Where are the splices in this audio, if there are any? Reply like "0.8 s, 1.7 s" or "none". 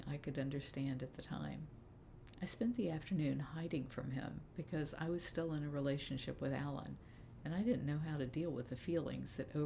2.3 s